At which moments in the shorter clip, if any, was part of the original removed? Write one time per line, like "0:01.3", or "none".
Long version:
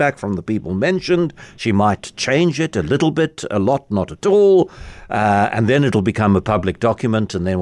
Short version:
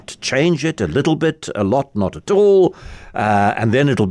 none